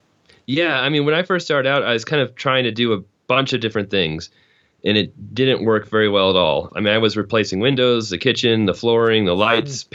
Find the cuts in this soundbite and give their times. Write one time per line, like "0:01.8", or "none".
0:06.7